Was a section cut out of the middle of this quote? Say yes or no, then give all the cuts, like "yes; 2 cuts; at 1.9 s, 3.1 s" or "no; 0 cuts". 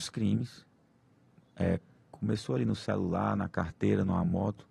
no; 0 cuts